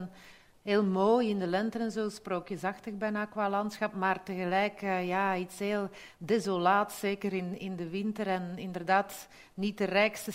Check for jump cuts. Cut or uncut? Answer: uncut